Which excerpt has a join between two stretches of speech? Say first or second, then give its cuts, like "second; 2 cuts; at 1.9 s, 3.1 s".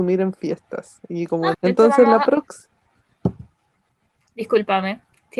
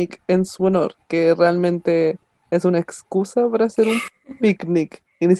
first; 1 cut; at 1.5 s